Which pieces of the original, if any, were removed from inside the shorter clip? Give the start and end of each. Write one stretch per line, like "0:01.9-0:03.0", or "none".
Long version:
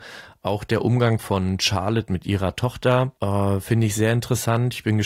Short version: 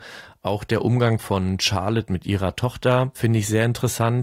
0:03.1-0:03.6